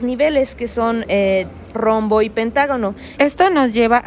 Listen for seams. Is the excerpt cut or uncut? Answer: cut